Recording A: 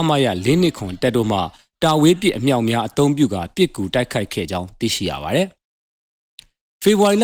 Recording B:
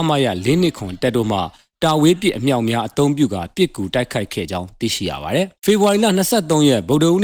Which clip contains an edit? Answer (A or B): B